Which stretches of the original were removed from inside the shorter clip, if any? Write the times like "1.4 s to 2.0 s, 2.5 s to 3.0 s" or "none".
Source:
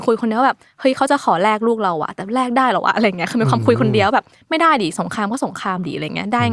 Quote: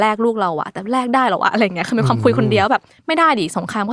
none